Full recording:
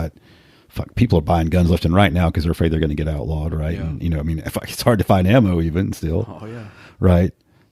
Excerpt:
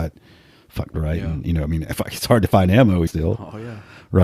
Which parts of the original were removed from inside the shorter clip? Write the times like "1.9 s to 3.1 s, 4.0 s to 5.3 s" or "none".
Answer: 0.9 s to 3.5 s, 5.6 s to 6.0 s